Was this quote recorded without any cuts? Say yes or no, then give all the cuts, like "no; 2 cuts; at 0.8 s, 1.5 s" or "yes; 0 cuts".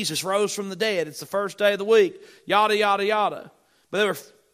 yes; 0 cuts